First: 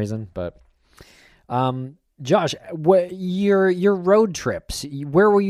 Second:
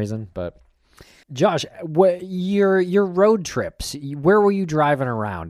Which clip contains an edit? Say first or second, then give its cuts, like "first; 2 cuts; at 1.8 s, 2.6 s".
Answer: second; 1 cut; at 1.2 s